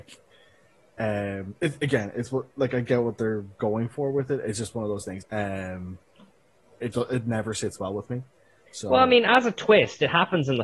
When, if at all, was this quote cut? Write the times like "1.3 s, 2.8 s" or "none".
5.2 s, 6.9 s